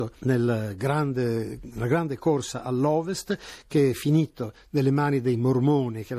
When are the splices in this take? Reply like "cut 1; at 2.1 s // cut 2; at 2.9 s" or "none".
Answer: none